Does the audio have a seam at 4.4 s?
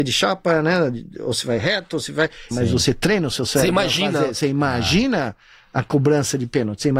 no; 1 cut; at 2.5 s

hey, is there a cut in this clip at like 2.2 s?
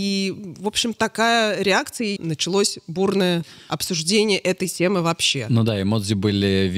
yes; 2 cuts; at 1.0 s, 2.2 s

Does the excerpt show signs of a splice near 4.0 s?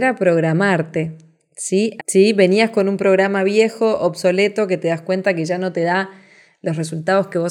no; 1 cut; at 2.0 s

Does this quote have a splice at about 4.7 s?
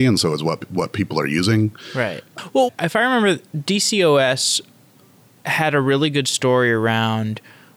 no; 1 cut; at 2.7 s

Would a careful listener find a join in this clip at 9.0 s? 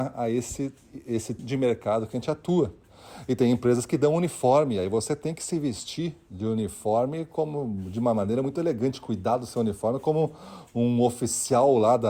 no; 1 cut; at 1.4 s

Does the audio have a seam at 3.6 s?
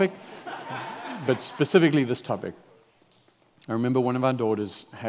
no; 0 cuts

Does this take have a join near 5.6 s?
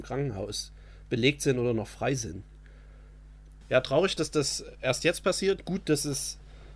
no; 1 cut; at 3.6 s

